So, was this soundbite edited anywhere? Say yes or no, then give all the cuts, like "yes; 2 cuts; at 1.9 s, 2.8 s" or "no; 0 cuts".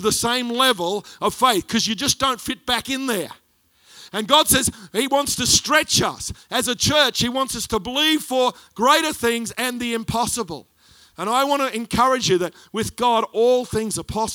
no; 0 cuts